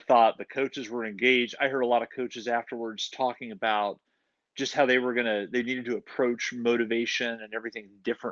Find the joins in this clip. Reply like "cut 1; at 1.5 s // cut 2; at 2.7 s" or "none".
none